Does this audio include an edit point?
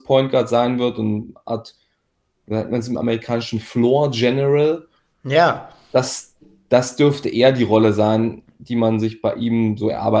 no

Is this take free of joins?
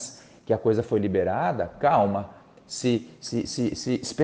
yes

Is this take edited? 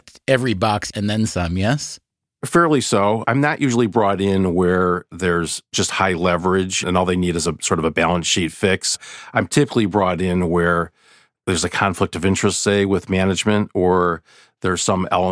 no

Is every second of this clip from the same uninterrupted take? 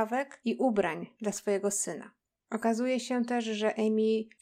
no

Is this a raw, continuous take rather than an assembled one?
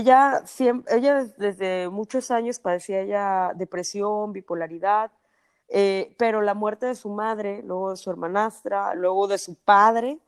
yes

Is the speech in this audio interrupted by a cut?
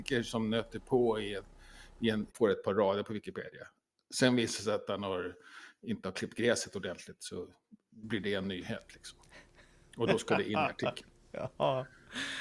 yes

